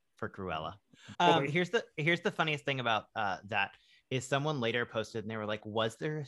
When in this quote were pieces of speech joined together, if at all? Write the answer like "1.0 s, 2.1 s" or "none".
1.1 s